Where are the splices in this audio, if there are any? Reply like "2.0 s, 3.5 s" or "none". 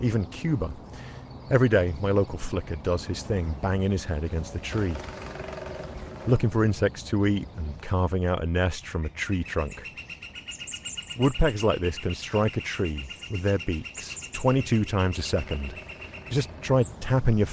none